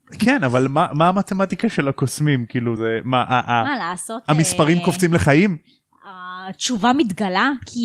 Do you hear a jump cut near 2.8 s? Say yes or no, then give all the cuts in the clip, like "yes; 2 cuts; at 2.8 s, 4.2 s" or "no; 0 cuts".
yes; 1 cut; at 2.8 s